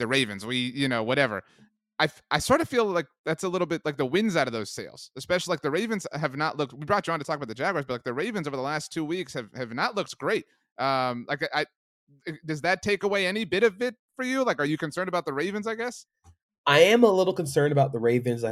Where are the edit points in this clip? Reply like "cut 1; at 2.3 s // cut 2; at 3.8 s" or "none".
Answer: none